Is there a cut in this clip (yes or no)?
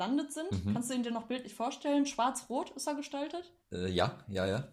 yes